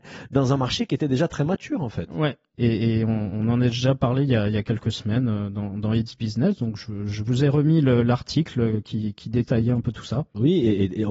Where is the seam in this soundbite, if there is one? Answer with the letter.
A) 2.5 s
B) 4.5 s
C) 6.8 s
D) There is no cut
A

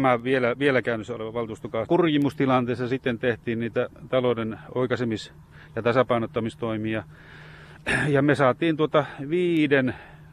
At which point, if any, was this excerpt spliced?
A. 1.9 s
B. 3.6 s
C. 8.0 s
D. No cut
A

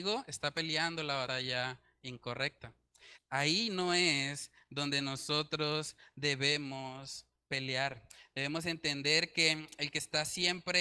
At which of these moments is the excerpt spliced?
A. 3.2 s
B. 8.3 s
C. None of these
A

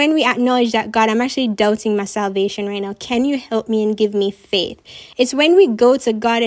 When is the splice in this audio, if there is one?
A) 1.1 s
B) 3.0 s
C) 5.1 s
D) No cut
D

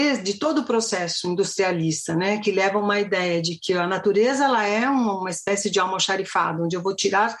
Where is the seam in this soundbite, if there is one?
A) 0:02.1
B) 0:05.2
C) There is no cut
C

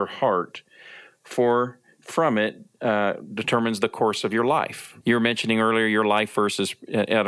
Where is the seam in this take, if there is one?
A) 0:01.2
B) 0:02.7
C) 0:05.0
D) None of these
C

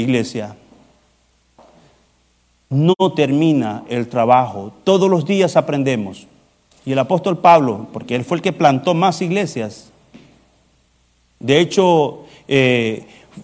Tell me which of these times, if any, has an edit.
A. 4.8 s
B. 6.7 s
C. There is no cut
B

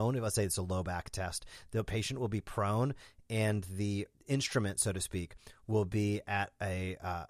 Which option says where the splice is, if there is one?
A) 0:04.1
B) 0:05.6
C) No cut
A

